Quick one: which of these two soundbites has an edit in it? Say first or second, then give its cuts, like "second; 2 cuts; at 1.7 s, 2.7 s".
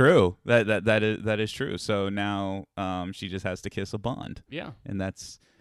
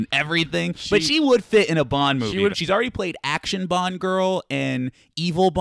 second; 1 cut; at 2.5 s